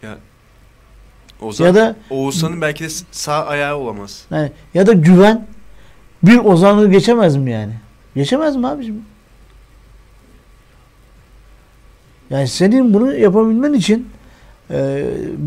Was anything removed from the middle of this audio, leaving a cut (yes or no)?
yes